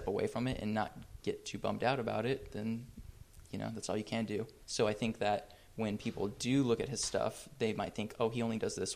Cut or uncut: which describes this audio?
cut